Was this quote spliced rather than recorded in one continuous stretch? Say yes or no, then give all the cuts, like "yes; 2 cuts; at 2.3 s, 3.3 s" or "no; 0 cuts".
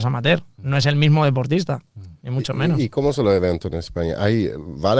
no; 0 cuts